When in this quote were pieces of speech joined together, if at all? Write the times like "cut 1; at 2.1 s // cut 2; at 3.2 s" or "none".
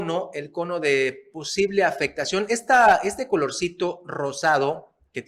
none